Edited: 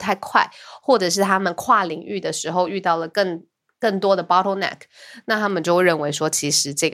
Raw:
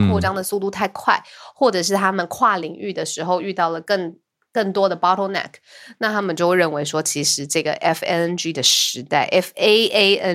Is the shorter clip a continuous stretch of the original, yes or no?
yes